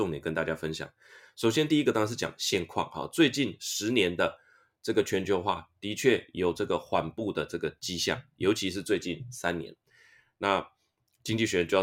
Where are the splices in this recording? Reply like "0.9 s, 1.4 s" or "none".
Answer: none